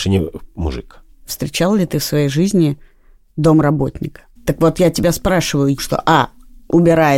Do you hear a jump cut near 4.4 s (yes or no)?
yes